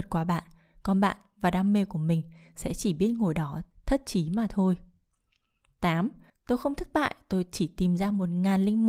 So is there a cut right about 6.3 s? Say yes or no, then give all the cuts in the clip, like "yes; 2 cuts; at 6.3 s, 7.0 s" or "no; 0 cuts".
yes; 1 cut; at 6.3 s